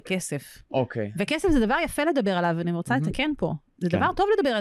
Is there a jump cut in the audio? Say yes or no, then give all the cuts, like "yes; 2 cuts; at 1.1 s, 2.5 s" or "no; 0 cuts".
no; 0 cuts